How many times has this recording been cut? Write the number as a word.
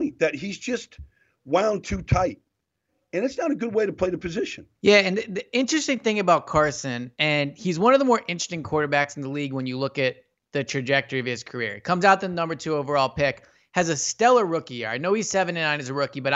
one